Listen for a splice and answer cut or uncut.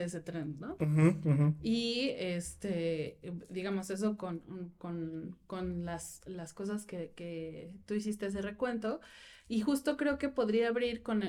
uncut